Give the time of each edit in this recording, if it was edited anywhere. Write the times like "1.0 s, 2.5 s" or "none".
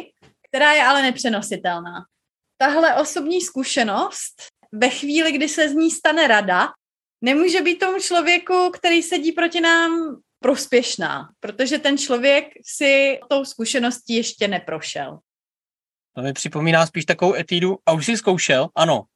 none